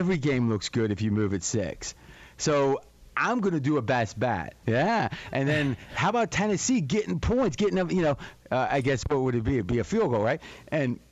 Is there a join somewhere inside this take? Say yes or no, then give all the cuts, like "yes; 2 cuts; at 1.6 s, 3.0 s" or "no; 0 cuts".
yes; 1 cut; at 4.6 s